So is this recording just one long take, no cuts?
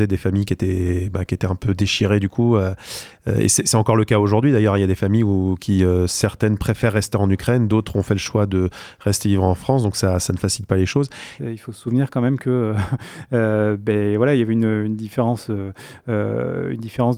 no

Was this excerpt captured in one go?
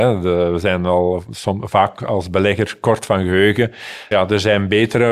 no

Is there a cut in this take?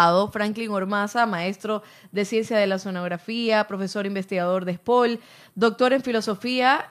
no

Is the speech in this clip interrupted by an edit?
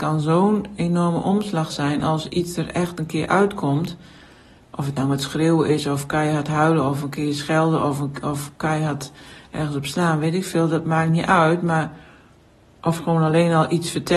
no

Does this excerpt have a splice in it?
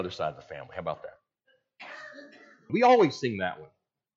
yes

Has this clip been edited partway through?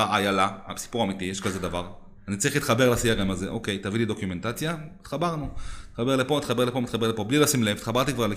no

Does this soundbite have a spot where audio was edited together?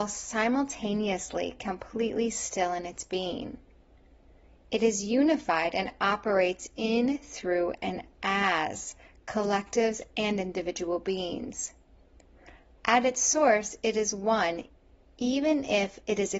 no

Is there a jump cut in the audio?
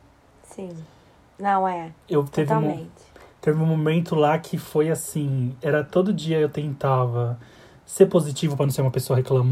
no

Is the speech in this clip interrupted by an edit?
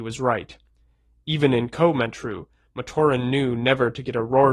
no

